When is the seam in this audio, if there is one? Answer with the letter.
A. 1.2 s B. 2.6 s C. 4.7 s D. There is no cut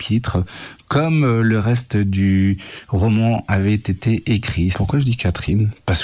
C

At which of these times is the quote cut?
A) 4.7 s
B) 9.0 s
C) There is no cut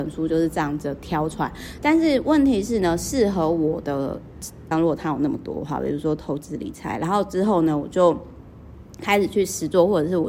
A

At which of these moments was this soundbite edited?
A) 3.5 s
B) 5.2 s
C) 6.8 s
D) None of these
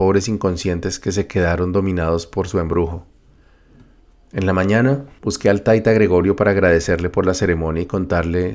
B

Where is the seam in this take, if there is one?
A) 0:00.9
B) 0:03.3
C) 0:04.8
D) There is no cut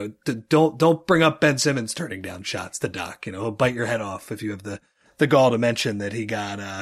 D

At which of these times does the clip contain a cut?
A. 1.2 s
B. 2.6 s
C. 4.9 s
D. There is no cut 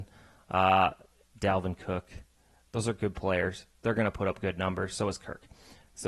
A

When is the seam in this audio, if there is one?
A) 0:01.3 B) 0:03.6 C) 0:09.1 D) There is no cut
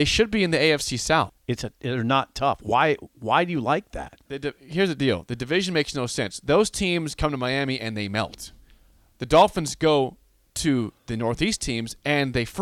A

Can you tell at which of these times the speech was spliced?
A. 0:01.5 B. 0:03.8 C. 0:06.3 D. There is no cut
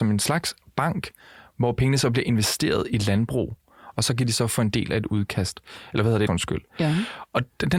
C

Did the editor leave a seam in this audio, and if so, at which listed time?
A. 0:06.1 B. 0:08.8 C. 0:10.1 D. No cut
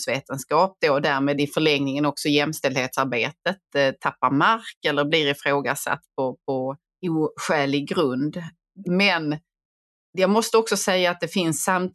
B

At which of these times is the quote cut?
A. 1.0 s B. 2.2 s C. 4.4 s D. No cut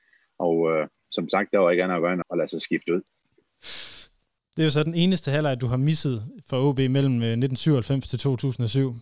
B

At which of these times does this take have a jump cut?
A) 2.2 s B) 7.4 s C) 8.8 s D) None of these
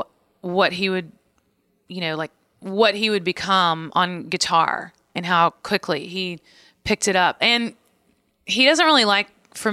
B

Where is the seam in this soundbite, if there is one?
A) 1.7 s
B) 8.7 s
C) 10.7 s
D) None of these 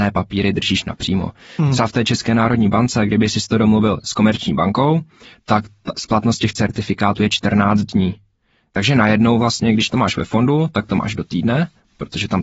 D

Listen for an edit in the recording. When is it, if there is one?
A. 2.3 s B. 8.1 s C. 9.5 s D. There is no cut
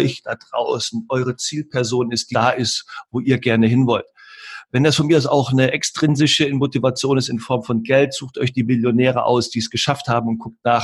A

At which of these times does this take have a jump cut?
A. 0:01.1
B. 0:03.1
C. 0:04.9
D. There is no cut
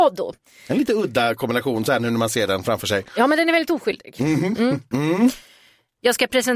C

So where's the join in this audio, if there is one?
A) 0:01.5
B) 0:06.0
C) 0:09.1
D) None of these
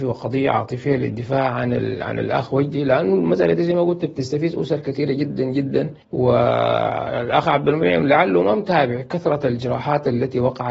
B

